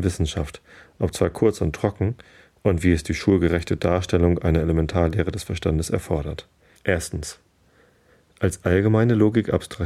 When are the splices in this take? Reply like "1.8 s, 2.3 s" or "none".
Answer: 6.8 s